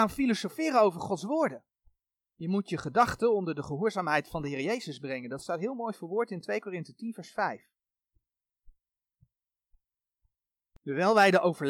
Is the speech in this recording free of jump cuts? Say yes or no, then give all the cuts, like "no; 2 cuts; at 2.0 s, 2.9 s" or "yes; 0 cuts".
yes; 0 cuts